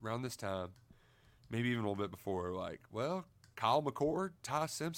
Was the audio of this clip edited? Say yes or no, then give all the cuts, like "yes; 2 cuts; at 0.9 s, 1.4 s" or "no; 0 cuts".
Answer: no; 0 cuts